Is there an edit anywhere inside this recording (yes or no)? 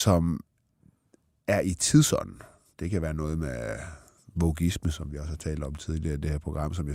no